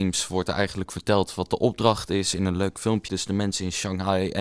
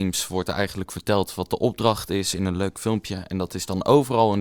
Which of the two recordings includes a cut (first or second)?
first